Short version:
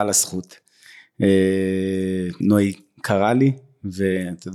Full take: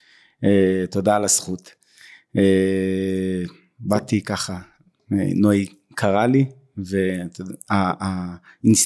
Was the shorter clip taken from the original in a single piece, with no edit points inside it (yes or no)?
no